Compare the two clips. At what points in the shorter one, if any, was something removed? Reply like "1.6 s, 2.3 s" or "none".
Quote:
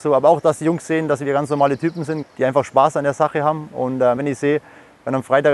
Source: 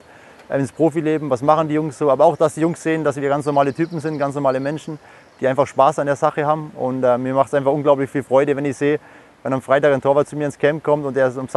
2.2 s, 4.2 s